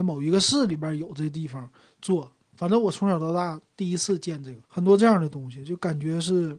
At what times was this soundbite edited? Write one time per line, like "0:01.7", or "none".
0:04.6